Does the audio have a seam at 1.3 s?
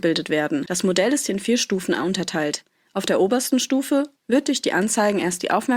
no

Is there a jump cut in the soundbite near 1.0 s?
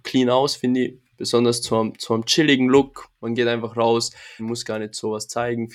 no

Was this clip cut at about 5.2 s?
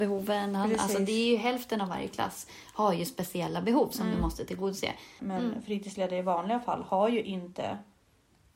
yes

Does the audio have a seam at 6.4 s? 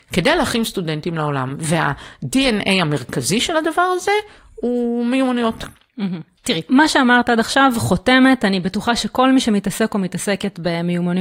yes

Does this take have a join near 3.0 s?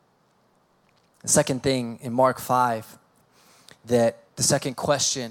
no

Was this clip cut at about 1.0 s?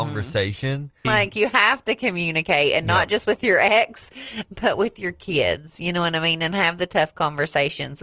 yes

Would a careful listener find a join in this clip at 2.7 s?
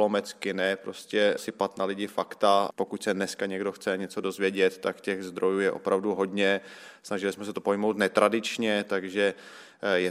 no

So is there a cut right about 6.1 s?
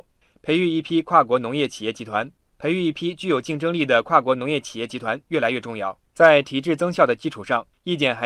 yes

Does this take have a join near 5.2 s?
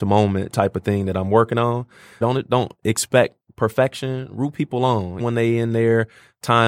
yes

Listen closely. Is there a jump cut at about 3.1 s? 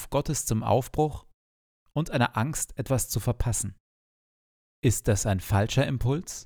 no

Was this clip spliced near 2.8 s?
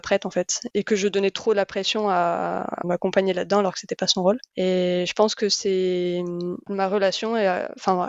yes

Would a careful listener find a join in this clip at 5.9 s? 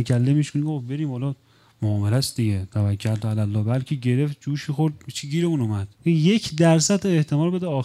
yes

